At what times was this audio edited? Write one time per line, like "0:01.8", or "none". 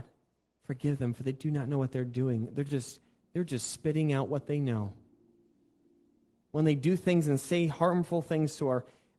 none